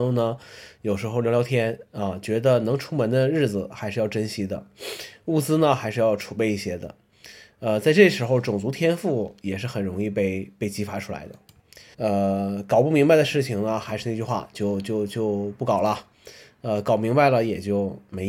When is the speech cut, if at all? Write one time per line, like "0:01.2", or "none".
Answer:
0:11.9